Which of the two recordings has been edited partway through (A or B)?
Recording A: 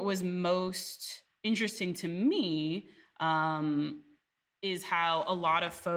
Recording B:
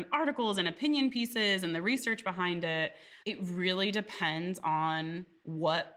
B